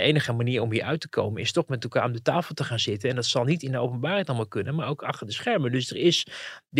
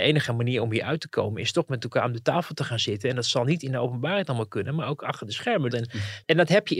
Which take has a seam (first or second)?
second